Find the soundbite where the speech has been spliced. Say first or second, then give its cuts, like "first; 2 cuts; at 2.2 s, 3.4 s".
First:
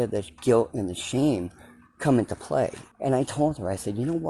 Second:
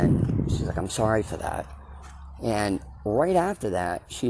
first; 1 cut; at 2.9 s